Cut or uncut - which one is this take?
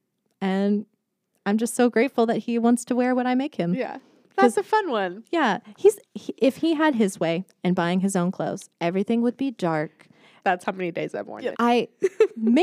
cut